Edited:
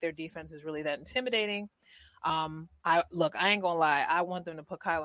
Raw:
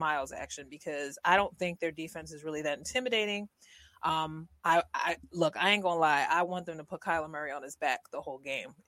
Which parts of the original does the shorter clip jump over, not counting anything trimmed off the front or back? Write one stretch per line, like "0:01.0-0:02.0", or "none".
0:04.9-0:05.3

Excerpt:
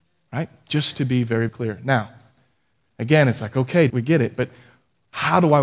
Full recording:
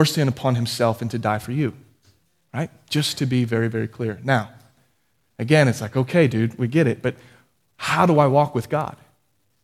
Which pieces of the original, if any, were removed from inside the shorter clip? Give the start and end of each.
0:03.7-0:03.9
0:06.3-0:06.6

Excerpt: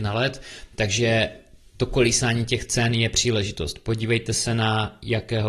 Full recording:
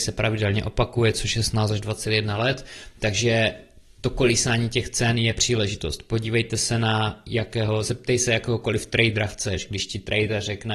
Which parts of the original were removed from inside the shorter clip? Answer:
none

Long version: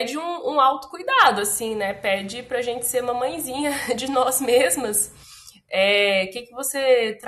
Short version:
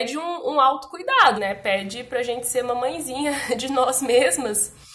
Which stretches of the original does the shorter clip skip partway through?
0:01.3-0:01.7

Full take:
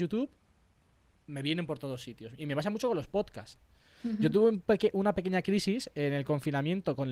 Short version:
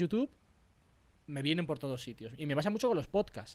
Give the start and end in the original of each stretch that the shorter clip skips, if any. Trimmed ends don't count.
none

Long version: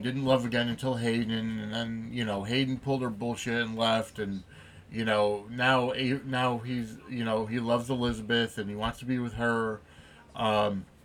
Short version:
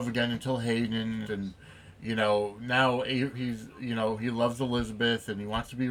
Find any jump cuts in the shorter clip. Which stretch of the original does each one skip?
0:01.6-0:04.1
0:06.2-0:06.6

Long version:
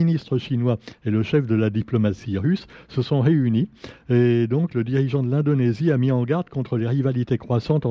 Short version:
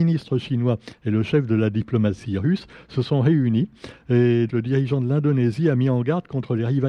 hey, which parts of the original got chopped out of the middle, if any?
0:04.5-0:04.7

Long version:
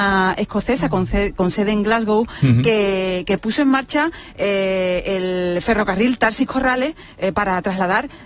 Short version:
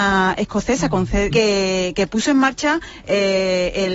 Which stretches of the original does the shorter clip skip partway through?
0:01.3-0:02.6

